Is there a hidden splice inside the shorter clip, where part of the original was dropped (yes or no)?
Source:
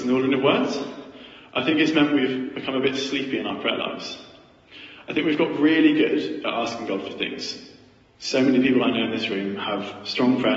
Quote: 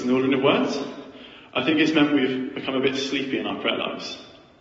no